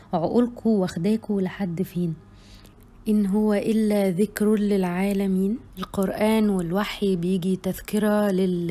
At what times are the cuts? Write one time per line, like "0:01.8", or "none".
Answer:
none